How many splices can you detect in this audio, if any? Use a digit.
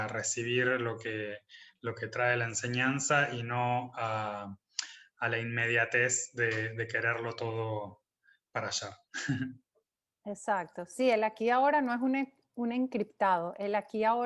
0